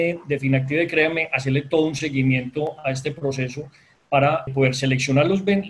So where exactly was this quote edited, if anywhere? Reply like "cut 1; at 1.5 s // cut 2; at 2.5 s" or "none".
cut 1; at 4.5 s